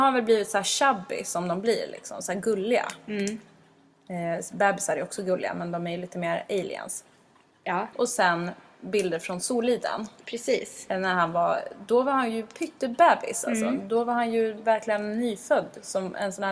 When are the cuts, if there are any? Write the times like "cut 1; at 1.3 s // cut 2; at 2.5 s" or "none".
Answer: cut 1; at 7.9 s